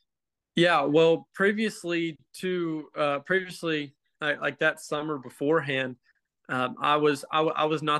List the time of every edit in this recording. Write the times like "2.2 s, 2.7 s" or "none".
2.3 s